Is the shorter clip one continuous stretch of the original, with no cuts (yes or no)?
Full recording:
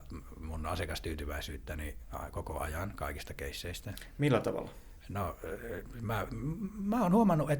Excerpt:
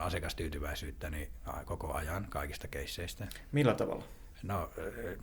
yes